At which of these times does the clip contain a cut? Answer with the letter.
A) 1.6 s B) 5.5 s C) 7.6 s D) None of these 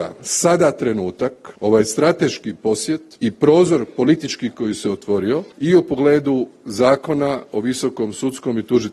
B